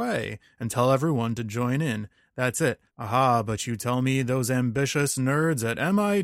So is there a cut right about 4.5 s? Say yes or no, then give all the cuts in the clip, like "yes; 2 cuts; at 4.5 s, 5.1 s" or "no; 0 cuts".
no; 1 cut; at 2.9 s